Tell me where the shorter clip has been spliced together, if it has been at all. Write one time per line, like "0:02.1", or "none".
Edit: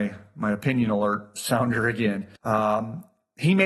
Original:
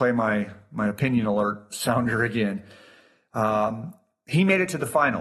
0:02.4